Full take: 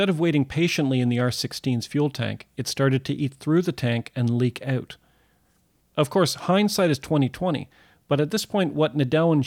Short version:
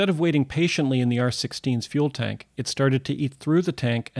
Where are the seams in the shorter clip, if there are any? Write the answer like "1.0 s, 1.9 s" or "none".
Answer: none